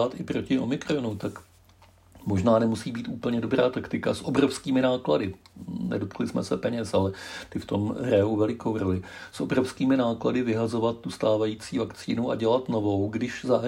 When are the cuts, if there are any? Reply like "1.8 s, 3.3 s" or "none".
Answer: none